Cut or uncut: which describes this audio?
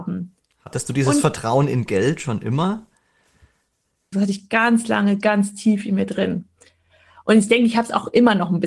cut